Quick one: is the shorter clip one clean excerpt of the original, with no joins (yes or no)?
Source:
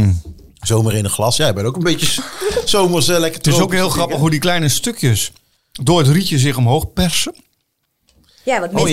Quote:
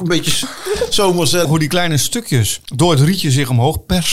no